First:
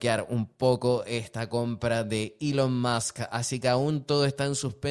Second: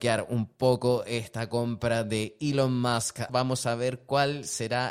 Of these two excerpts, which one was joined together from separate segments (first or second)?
second